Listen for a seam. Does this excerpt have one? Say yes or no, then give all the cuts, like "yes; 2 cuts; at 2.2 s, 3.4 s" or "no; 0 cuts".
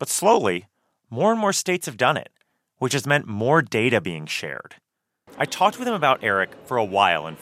yes; 1 cut; at 5.3 s